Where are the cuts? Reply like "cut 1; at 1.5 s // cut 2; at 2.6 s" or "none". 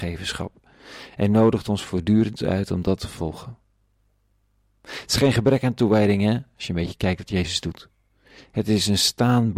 none

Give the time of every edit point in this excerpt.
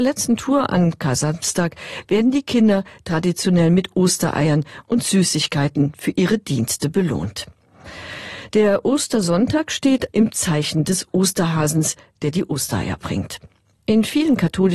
cut 1; at 10.1 s // cut 2; at 13.7 s

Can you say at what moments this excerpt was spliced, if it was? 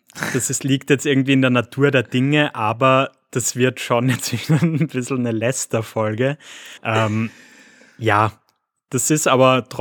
cut 1; at 6.8 s

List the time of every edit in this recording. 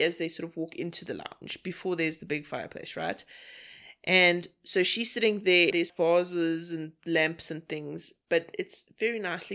cut 1; at 5.7 s

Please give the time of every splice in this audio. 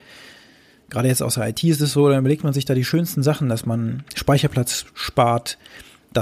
none

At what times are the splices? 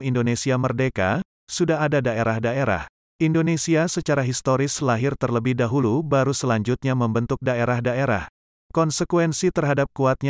cut 1; at 3.0 s // cut 2; at 8.5 s

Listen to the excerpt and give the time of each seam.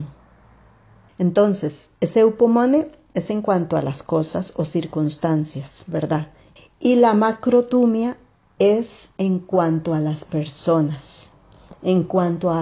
cut 1; at 1.1 s // cut 2; at 6.6 s

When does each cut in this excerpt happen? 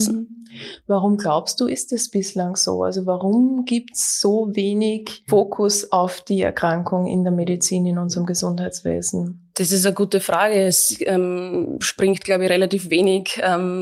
none

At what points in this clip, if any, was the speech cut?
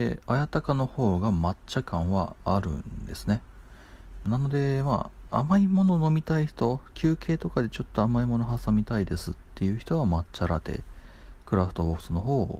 cut 1; at 4.2 s

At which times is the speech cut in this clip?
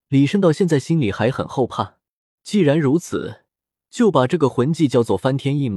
cut 1; at 2.4 s

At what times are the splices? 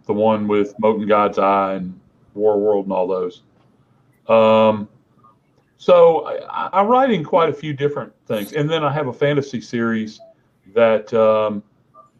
cut 1; at 6.7 s

